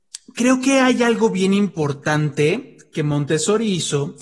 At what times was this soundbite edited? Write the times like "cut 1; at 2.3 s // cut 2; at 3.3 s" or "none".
none